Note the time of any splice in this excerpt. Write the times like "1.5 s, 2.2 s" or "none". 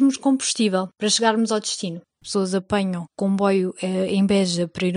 2.2 s